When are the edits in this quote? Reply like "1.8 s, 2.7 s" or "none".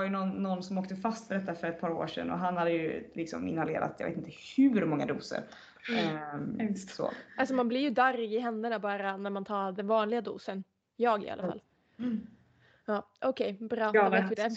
7.3 s